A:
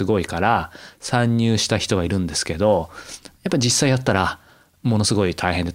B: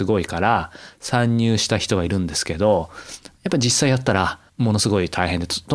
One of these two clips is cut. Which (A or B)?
B